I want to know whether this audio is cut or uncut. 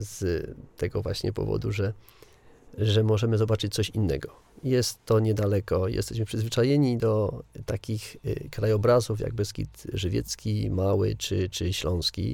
uncut